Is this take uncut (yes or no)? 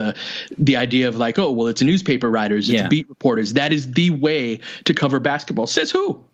yes